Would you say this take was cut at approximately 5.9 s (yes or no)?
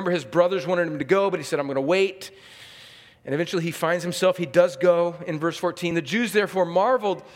no